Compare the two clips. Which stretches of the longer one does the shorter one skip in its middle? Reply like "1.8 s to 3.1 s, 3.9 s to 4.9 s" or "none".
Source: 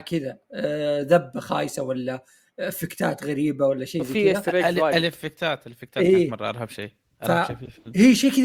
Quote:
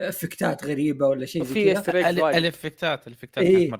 none